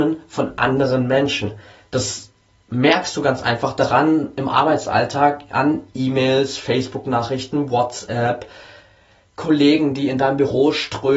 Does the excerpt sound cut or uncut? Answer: uncut